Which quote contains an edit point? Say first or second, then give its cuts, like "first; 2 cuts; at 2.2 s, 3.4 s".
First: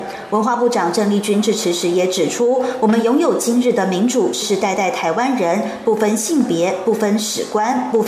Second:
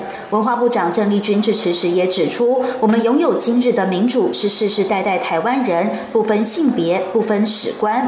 first; 1 cut; at 4.4 s